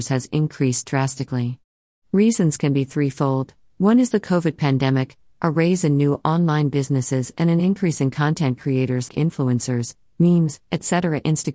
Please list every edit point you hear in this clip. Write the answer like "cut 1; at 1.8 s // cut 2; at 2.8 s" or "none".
cut 1; at 9.1 s // cut 2; at 10.6 s